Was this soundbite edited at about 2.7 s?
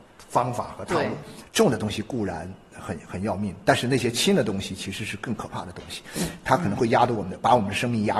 no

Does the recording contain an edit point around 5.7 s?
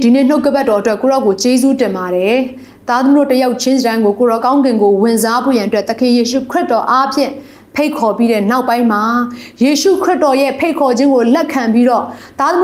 no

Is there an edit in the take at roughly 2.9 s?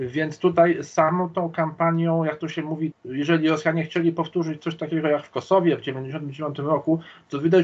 yes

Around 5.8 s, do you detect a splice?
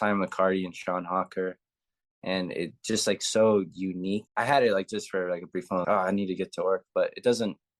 yes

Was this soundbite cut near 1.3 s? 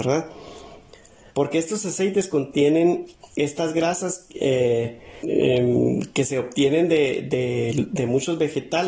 yes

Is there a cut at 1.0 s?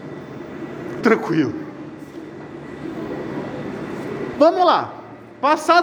yes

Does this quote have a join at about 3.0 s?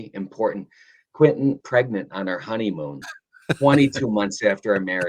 yes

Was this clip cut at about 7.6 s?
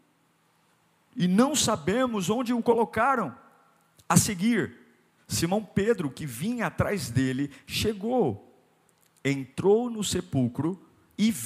no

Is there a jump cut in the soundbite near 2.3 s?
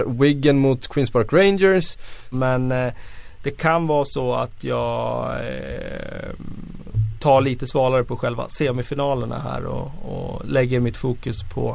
yes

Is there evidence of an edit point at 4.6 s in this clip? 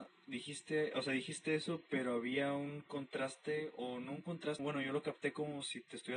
yes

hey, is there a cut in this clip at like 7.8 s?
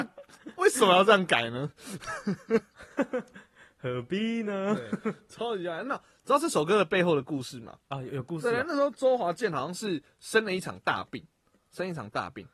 yes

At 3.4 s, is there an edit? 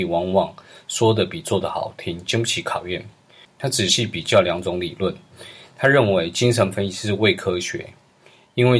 yes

